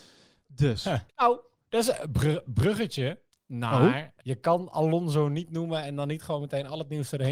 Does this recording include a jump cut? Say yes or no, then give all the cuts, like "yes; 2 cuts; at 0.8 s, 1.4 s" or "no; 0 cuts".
yes; 2 cuts; at 1.1 s, 4.2 s